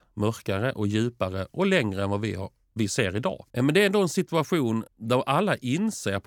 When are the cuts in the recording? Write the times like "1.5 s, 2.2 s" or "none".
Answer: 3.5 s, 4.9 s